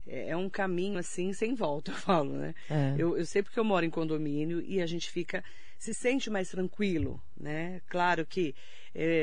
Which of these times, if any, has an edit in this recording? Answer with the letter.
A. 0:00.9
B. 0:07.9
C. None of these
C